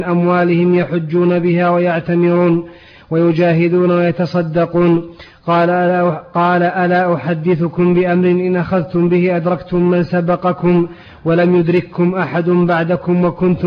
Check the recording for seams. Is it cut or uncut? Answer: uncut